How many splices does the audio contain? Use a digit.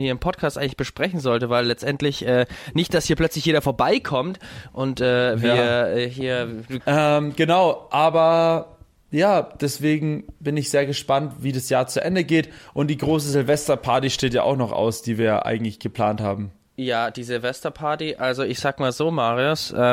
1